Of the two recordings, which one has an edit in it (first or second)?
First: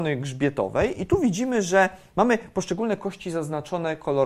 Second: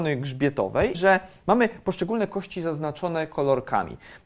second